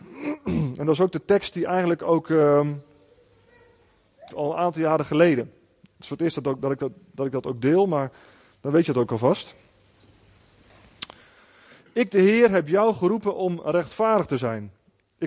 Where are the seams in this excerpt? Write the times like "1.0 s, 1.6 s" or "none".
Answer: 4.3 s